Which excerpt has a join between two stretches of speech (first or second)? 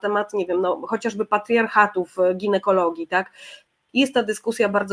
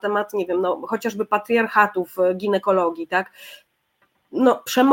first